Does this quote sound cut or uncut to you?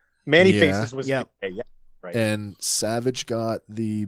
uncut